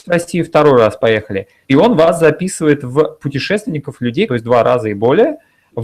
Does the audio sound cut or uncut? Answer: cut